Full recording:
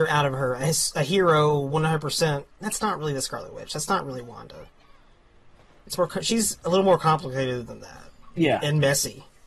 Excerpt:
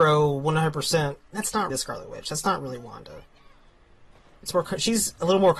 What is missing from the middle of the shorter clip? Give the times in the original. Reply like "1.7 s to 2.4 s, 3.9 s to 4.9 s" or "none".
3.0 s to 3.1 s